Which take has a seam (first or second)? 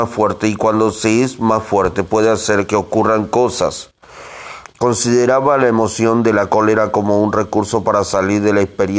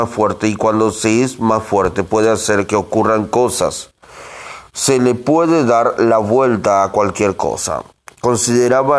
first